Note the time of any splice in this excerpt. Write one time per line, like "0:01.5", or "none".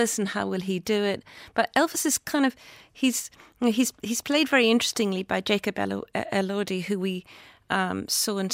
none